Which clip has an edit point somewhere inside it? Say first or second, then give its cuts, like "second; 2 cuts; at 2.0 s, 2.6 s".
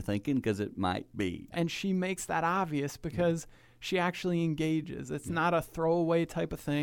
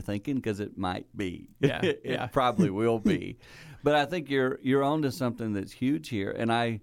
first; 1 cut; at 1.5 s